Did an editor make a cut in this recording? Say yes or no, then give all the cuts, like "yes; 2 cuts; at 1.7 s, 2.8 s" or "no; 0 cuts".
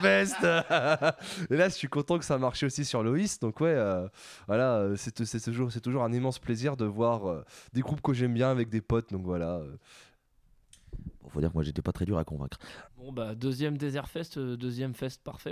yes; 1 cut; at 12.8 s